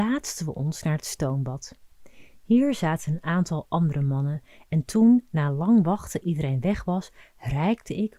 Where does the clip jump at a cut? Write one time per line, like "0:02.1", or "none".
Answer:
none